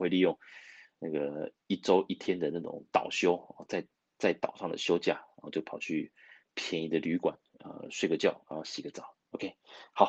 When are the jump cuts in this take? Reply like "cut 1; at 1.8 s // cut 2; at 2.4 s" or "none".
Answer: none